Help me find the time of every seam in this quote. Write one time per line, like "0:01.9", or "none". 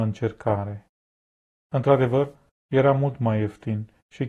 none